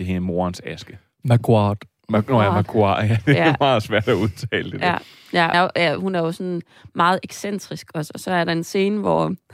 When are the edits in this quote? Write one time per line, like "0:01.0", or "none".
0:05.5